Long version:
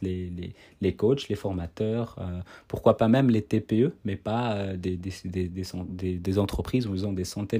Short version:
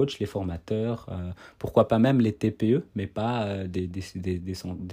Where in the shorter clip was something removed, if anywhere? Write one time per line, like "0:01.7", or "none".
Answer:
none